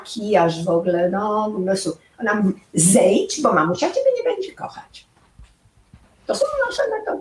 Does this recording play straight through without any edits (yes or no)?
no